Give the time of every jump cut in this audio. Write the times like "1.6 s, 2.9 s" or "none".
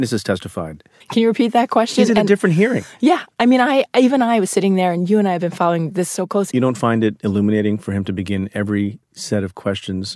1.0 s, 6.5 s